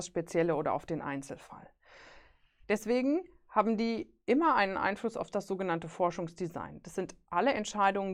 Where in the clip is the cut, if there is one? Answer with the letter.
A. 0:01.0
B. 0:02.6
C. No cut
B